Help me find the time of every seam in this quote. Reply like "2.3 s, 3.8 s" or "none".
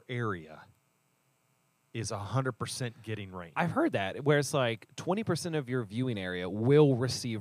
none